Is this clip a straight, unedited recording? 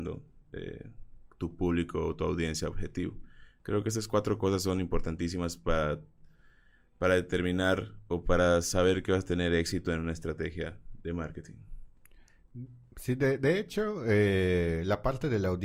yes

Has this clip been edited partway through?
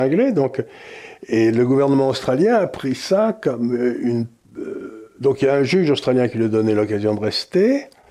no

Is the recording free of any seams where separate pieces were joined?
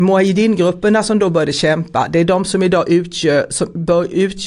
yes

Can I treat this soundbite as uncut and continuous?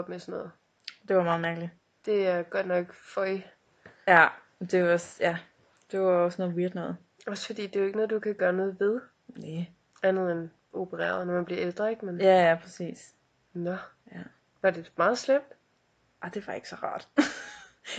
yes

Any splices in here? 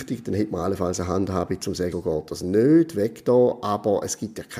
yes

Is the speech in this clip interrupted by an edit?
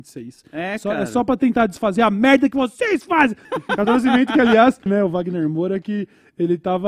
yes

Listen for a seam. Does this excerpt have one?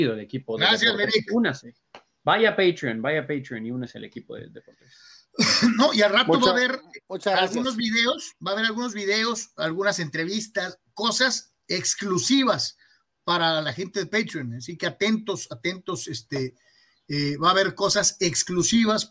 no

